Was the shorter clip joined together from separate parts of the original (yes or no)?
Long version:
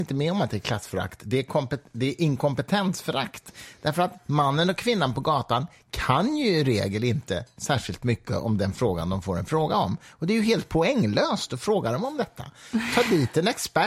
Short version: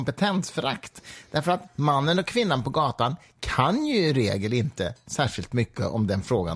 no